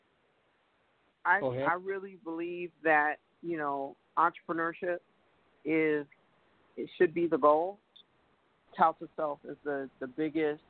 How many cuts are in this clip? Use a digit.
2